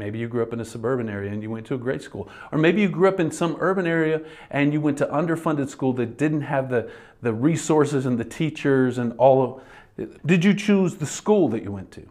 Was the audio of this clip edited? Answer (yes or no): yes